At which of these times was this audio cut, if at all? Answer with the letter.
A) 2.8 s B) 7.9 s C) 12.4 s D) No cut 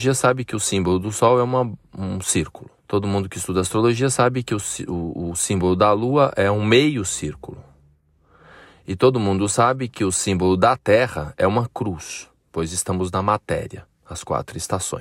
A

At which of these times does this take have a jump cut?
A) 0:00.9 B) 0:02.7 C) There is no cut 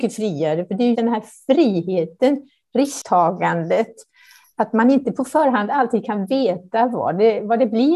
A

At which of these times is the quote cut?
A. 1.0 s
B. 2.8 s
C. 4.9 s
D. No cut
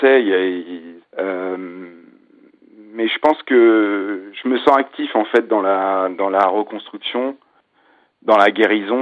A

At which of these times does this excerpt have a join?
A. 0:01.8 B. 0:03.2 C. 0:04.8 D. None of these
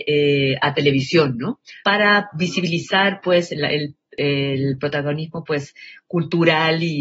A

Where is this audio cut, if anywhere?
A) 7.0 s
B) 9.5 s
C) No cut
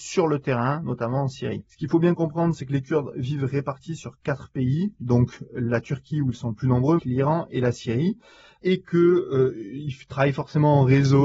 A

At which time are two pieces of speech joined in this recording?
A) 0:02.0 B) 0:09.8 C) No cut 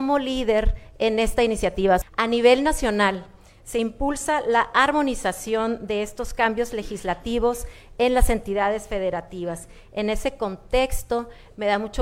A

